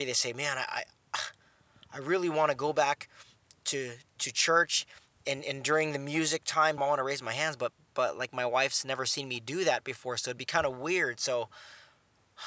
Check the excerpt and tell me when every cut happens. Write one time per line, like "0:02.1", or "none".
0:06.8